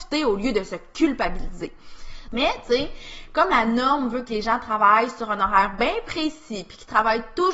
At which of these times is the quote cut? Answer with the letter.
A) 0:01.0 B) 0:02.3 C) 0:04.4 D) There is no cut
B